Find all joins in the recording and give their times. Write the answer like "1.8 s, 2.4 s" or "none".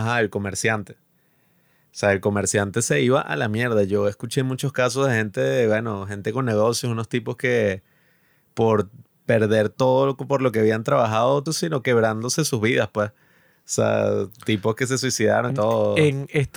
11.5 s, 15.5 s